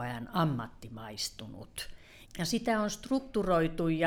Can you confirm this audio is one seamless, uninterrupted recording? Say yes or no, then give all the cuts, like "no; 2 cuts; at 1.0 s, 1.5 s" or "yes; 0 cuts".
no; 1 cut; at 2.2 s